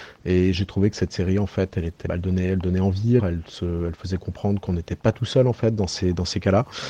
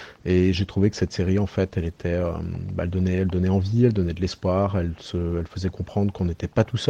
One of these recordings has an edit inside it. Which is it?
first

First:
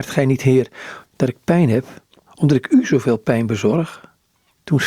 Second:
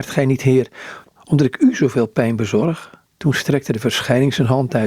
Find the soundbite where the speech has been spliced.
second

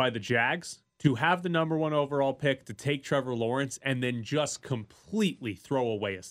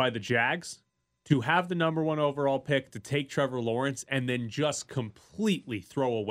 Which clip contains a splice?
first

